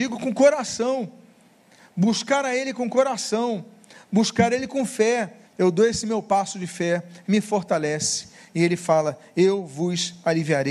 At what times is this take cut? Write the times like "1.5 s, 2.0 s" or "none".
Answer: 5.4 s, 7.2 s